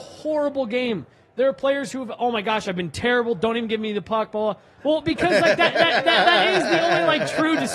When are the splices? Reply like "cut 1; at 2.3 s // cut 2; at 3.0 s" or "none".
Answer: cut 1; at 4.8 s